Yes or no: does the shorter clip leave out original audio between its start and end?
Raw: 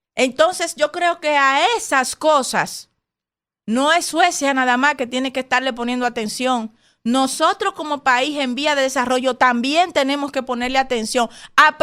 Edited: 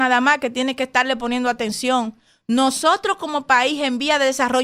no